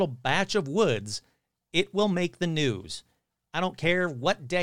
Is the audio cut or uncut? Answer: uncut